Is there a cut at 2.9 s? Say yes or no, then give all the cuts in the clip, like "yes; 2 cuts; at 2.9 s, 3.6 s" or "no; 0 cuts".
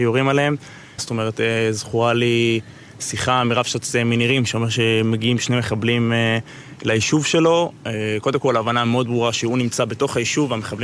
no; 1 cut; at 1.0 s